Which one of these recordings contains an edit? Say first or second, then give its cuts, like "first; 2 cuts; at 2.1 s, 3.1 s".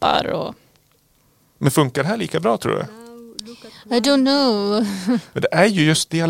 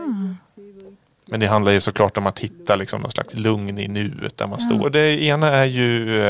second; 1 cut; at 4.8 s